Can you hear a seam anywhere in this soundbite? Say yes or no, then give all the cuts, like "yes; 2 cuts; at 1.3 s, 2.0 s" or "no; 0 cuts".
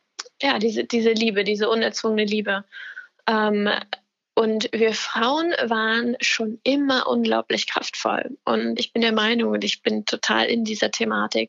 yes; 1 cut; at 8.8 s